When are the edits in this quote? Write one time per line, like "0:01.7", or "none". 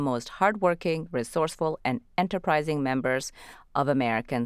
none